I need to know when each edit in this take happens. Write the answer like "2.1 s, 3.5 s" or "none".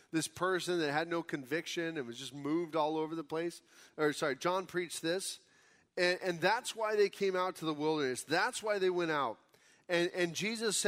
3.9 s